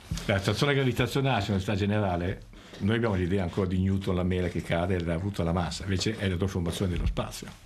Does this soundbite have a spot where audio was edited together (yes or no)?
no